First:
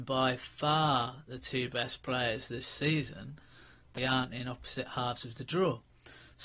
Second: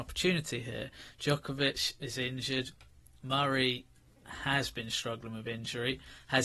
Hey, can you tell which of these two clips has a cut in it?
first; 1 cut; at 4.0 s

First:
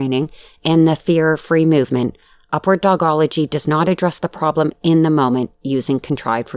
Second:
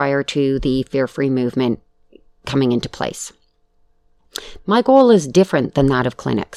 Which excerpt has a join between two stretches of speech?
second; 1 cut; at 4.6 s

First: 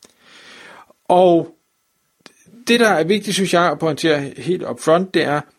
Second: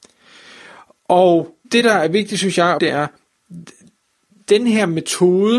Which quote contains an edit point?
second; 2 cuts; at 1.6 s, 2.8 s

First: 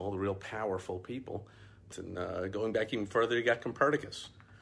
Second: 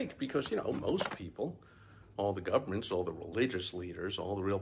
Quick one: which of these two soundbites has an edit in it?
first; 1 cut; at 1.9 s

